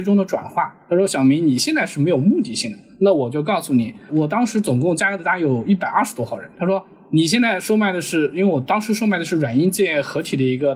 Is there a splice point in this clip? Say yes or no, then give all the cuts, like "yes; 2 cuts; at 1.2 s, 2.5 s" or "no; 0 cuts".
yes; 1 cut; at 4.1 s